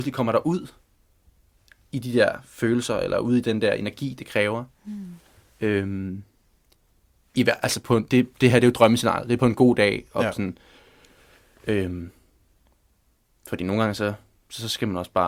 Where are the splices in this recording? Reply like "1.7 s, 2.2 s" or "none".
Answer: none